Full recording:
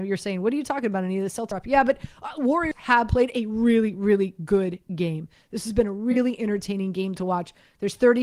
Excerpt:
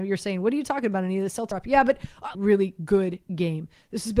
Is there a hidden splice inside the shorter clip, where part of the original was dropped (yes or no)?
yes